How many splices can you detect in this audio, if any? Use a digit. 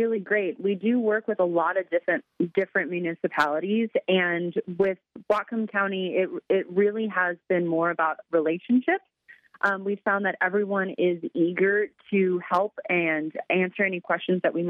0